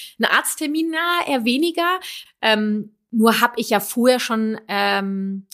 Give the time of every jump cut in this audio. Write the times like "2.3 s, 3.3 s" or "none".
2.3 s

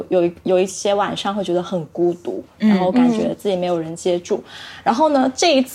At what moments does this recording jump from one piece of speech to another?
none

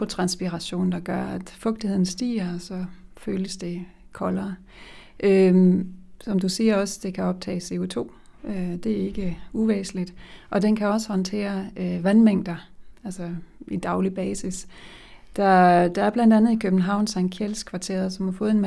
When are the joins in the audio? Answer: none

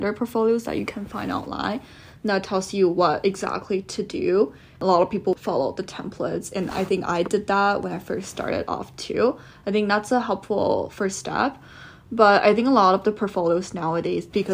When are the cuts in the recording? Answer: none

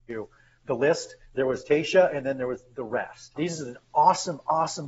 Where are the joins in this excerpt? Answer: 3.4 s

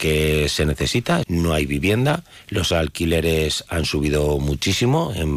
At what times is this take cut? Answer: 1.2 s

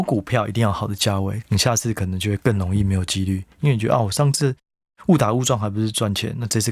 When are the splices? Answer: 1.4 s

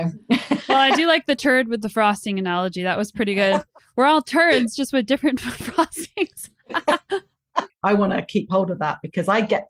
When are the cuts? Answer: 7.7 s

